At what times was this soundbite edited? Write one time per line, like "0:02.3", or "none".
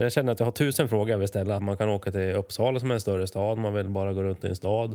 0:01.6

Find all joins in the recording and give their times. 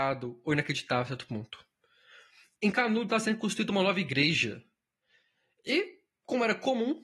none

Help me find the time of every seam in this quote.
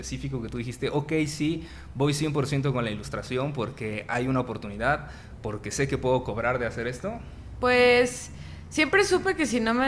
none

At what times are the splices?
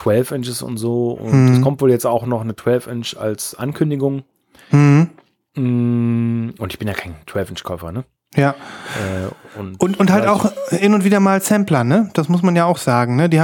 none

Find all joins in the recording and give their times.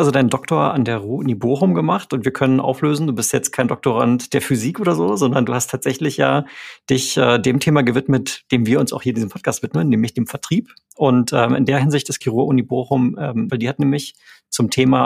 0:12.2
0:13.5

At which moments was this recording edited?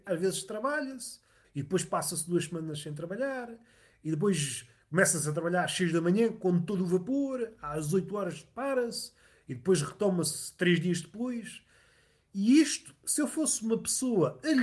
0:01.4

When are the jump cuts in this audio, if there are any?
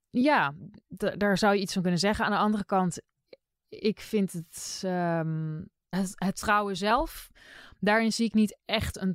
0:05.9

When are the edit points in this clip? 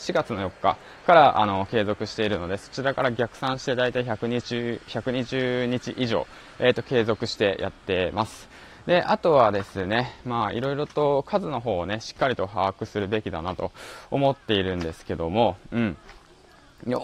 none

